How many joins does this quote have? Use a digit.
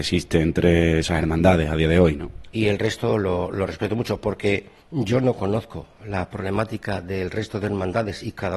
2